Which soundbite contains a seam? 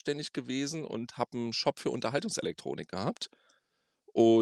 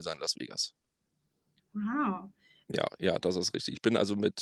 second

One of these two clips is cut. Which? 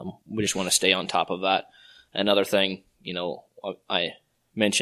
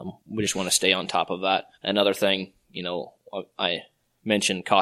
second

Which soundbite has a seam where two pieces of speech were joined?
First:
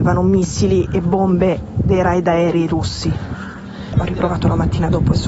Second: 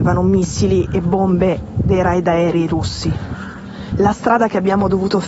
first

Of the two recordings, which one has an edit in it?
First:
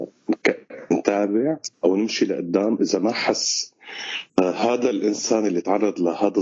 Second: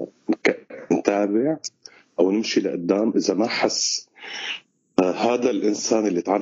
first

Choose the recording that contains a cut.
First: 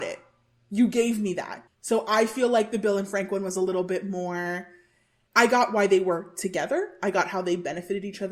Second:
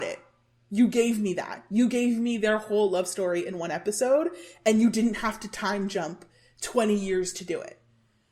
first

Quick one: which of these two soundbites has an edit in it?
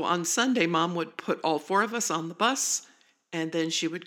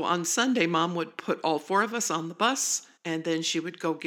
second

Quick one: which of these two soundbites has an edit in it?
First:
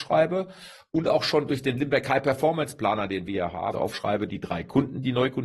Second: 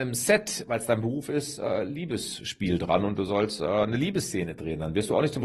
first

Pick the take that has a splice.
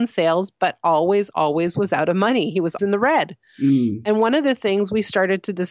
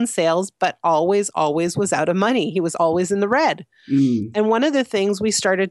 first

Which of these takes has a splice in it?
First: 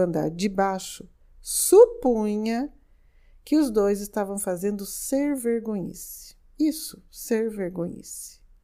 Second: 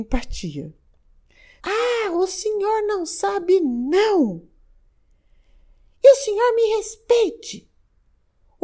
second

